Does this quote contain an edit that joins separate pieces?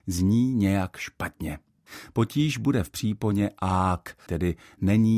yes; 1 cut; at 4.3 s

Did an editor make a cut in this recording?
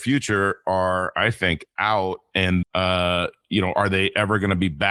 yes; 1 cut; at 2.6 s

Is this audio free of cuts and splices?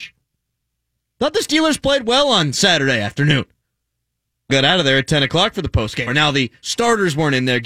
no; 2 cuts; at 4.5 s, 6.1 s

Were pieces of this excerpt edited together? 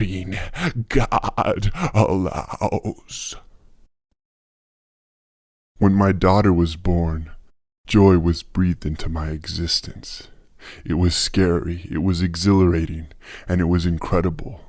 no; 0 cuts

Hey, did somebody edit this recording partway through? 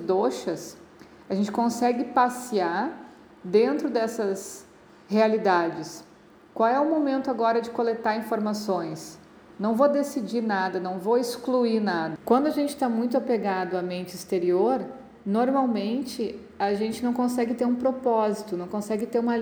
yes; 1 cut; at 12.1 s

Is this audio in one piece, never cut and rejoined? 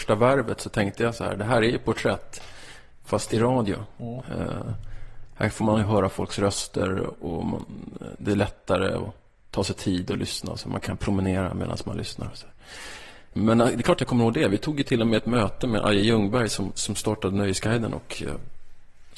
no; 1 cut; at 4.2 s

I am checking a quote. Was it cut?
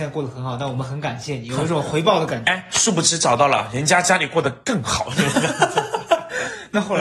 no; 0 cuts

